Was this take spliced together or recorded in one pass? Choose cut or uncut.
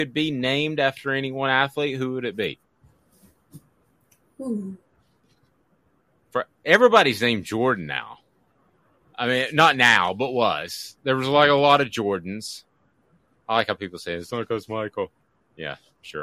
uncut